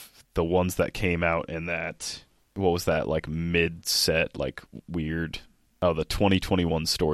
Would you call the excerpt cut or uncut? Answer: uncut